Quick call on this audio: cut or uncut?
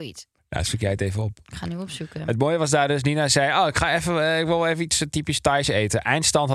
uncut